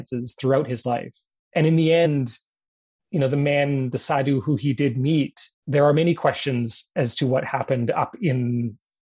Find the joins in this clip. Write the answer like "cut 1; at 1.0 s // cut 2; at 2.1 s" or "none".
cut 1; at 5.5 s